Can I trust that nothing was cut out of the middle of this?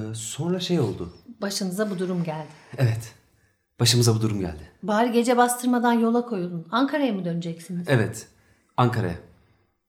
yes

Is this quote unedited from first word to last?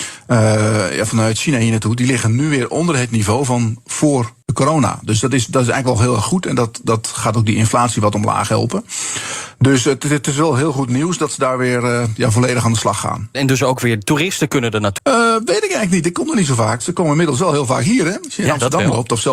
no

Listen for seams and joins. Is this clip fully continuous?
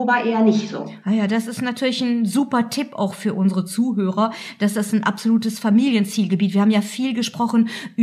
yes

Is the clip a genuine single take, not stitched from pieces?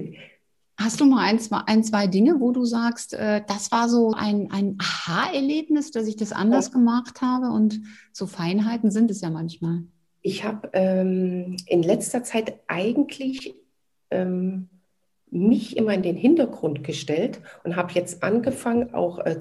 no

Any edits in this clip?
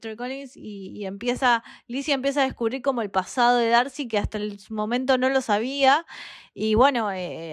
no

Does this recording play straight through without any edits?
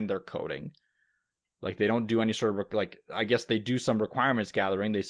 yes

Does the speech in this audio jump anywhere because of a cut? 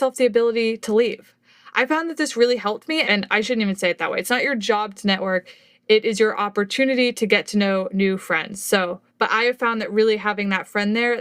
yes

